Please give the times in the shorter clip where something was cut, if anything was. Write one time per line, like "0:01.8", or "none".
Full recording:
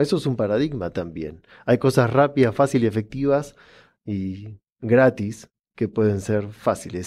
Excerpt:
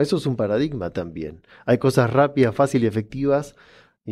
none